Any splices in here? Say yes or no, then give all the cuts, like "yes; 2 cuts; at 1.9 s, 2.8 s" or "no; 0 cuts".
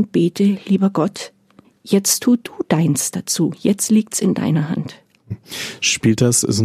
no; 0 cuts